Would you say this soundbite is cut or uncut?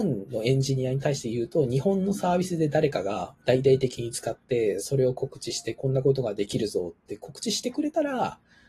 uncut